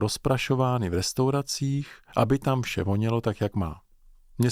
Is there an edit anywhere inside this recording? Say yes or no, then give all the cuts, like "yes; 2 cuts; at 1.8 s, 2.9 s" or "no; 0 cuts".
no; 0 cuts